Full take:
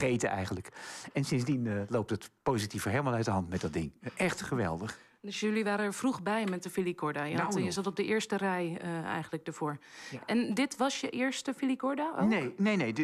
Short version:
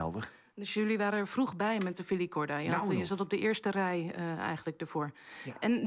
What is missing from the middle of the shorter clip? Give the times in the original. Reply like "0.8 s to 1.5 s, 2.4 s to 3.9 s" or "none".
none